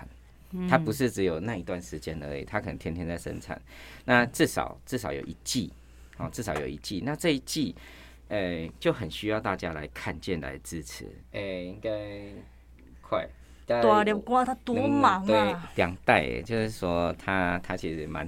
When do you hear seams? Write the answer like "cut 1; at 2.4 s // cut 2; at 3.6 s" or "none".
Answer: cut 1; at 11.2 s // cut 2; at 14.4 s